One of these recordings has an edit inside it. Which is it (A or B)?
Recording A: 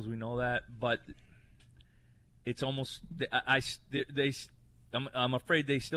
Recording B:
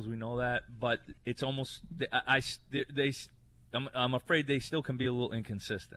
B